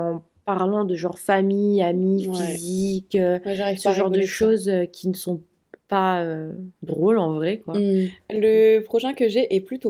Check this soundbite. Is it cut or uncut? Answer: uncut